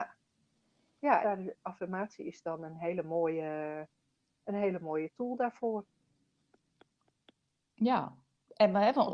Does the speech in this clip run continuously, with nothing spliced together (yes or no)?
no